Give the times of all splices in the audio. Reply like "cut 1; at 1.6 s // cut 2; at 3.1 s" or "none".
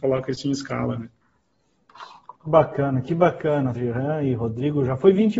cut 1; at 2.4 s // cut 2; at 3.7 s